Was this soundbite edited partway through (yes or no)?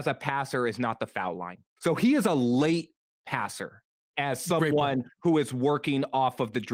yes